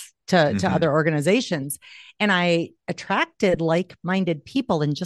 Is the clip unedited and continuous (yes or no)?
yes